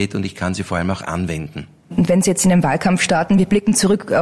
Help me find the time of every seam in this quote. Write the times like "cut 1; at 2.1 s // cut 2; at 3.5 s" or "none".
none